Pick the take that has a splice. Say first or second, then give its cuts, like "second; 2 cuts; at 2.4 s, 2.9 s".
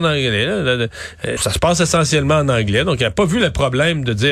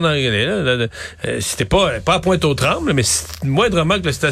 first; 1 cut; at 1.4 s